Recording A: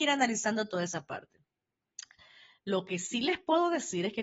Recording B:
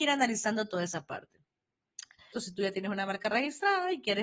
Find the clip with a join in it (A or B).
B